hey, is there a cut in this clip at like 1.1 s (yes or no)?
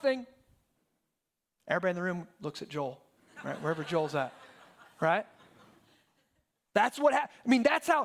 no